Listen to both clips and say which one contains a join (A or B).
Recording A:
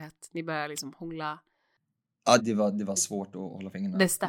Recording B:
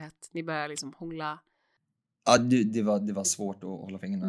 A